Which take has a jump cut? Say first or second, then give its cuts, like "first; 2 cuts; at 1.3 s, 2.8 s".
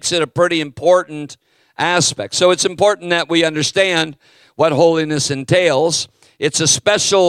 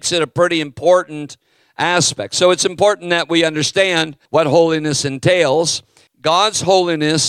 second; 2 cuts; at 4.3 s, 6.1 s